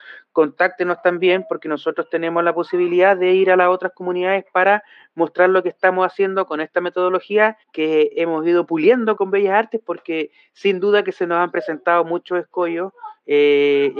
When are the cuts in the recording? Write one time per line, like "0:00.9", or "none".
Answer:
0:07.6
0:09.2